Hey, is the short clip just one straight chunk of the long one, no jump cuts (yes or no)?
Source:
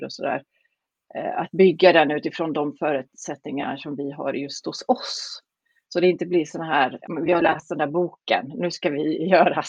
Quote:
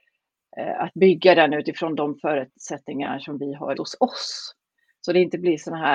no